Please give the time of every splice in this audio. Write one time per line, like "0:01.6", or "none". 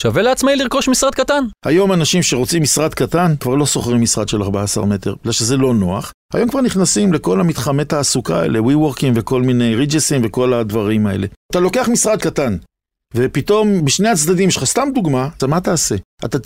0:15.4